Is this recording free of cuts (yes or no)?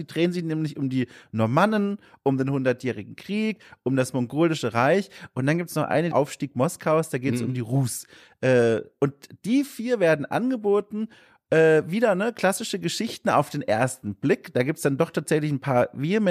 no